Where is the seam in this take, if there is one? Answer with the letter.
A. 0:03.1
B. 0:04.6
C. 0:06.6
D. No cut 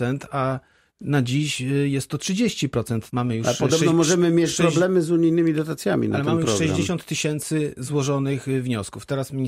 A